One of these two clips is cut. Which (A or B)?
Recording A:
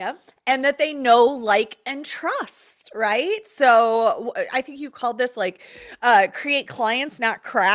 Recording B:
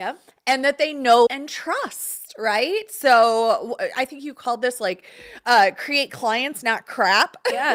B